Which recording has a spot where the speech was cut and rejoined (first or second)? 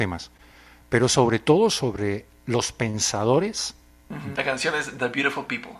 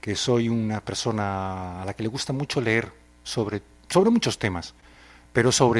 first